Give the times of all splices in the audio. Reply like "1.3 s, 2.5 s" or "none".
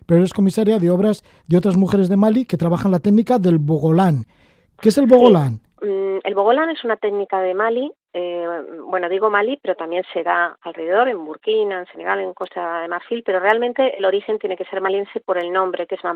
none